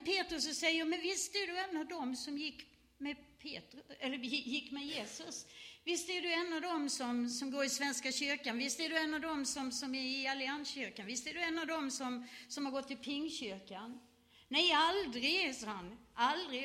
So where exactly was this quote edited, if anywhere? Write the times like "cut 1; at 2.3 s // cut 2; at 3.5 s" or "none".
none